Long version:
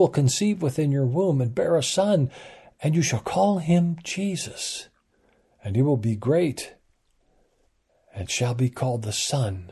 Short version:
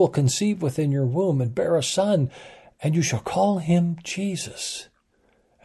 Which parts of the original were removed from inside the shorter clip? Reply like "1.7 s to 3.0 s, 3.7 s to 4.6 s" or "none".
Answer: none